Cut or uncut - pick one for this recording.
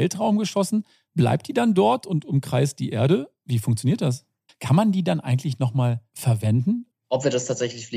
cut